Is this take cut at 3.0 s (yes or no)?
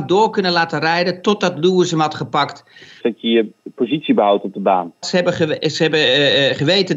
yes